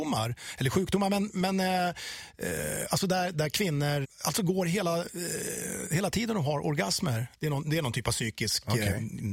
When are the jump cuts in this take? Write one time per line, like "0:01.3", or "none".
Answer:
0:04.0
0:07.3

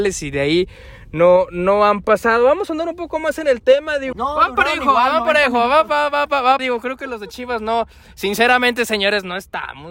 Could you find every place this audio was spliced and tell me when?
0:04.1
0:06.6

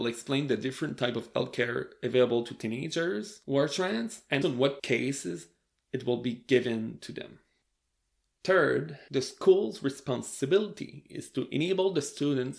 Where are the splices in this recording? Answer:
0:04.4
0:08.3

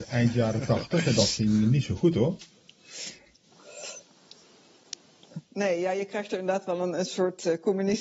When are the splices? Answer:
none

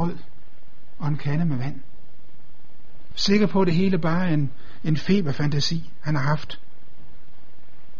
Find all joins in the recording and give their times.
0:03.1

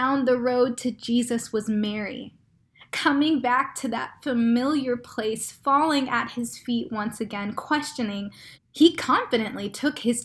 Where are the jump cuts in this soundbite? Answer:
0:08.5

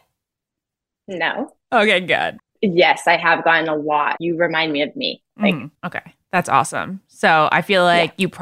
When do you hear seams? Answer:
0:02.4
0:04.2
0:05.8

